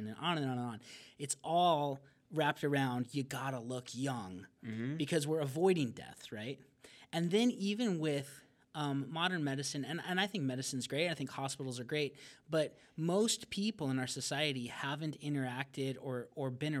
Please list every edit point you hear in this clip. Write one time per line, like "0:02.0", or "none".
none